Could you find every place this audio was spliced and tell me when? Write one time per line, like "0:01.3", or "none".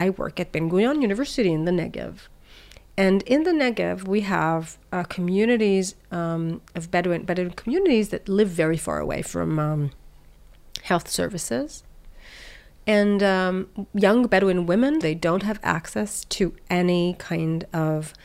0:13.9
0:15.0